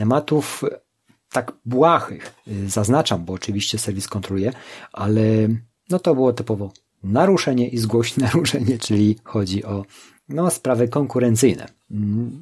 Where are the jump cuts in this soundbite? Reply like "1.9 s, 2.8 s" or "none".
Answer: 8.8 s